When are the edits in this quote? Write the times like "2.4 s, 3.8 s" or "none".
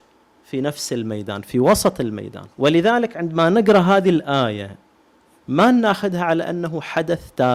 2.5 s